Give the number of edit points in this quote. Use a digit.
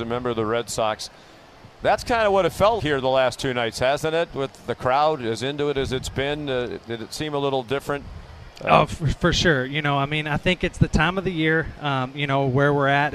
1